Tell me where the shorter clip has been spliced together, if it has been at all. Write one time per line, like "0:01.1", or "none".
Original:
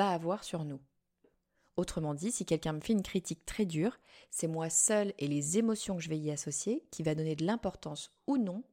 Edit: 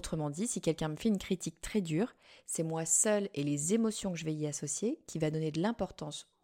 none